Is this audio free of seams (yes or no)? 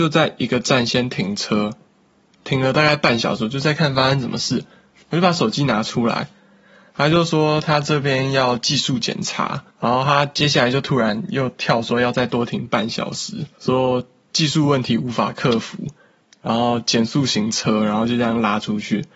yes